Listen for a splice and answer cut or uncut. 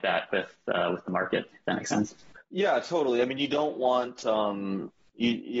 uncut